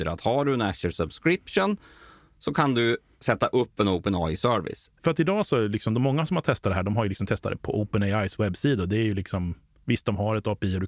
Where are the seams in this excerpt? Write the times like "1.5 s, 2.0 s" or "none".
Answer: 5.0 s

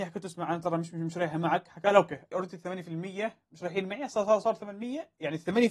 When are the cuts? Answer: 2.3 s

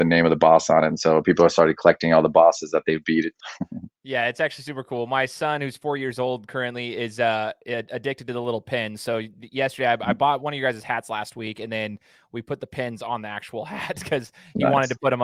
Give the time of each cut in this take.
3.4 s

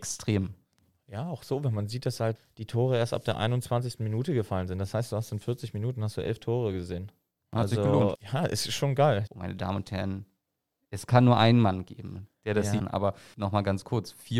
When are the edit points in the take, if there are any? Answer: 8.1 s, 9.3 s, 12.8 s

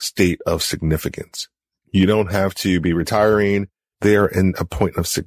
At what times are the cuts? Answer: 3.9 s

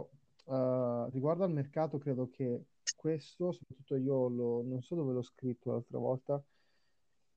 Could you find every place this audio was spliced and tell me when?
1.1 s

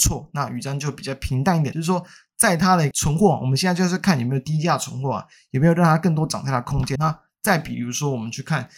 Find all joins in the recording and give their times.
1.7 s, 7.0 s

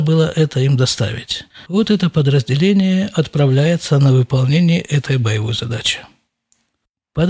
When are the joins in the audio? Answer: none

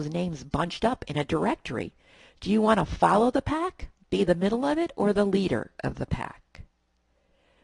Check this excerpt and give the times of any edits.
none

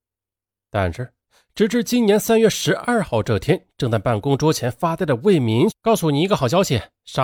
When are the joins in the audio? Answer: 5.7 s

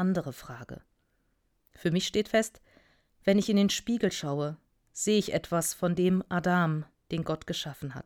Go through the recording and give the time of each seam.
7.0 s

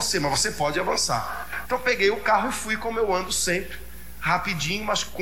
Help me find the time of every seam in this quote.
1.6 s

